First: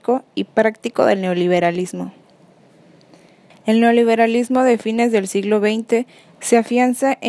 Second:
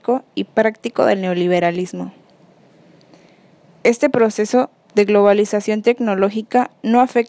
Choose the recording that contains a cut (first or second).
first